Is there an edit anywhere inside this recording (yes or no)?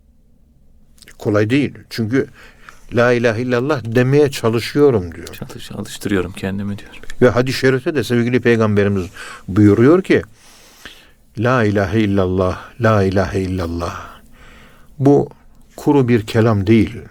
no